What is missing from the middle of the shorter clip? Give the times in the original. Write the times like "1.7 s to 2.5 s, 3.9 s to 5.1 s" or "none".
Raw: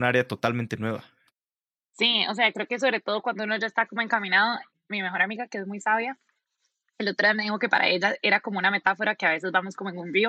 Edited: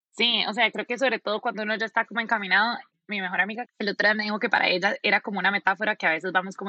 5.5 s to 6.8 s